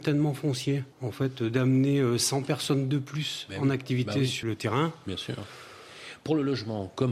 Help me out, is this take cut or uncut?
cut